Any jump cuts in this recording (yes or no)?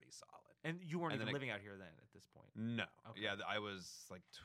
no